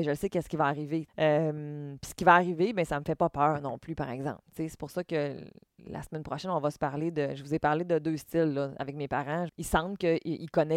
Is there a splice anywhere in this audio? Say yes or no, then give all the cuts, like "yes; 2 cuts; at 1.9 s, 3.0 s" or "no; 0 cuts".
yes; 2 cuts; at 1.1 s, 9.5 s